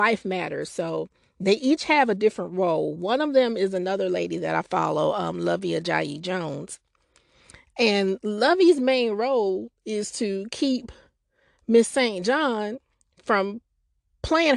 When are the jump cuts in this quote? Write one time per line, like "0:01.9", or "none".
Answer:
none

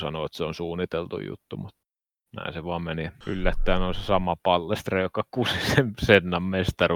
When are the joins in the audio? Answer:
0:03.2

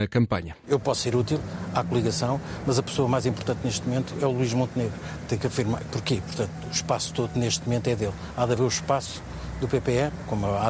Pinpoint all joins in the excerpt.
0:06.2

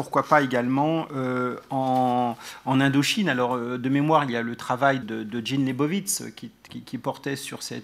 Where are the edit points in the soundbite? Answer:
0:05.0
0:06.7

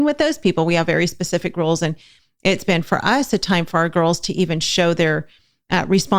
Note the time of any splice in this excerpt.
none

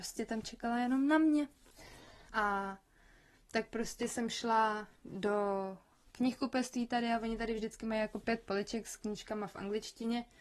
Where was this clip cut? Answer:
0:02.3

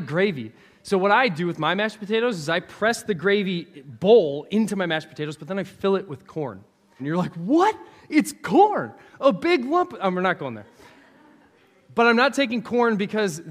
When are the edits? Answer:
0:07.0

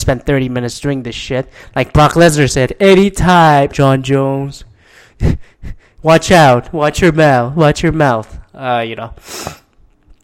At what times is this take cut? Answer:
0:03.7

